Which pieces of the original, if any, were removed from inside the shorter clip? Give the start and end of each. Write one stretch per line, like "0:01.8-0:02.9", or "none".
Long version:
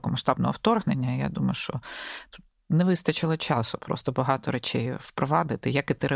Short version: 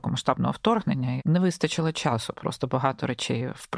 0:01.2-0:02.6